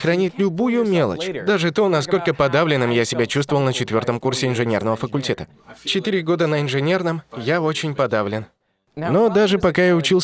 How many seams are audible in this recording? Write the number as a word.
zero